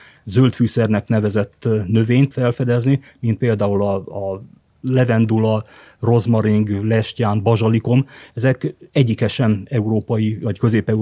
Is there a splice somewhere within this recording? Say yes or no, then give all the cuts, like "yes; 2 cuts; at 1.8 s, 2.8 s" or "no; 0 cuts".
yes; 1 cut; at 2.3 s